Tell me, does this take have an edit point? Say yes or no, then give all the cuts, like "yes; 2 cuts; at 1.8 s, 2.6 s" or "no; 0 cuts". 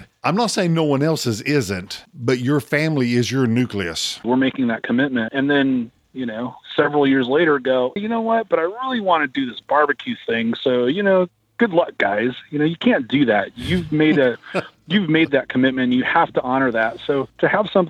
yes; 3 cuts; at 4.2 s, 5.3 s, 8.0 s